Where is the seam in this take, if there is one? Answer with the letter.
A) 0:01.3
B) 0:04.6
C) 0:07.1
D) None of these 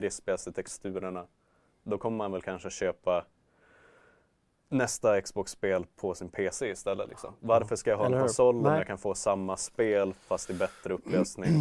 D